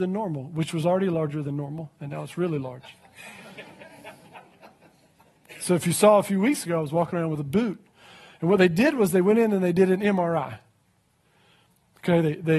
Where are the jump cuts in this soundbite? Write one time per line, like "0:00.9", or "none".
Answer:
none